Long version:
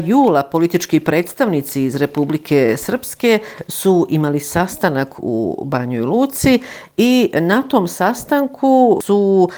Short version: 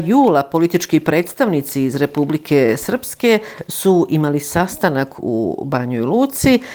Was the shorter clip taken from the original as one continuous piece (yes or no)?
yes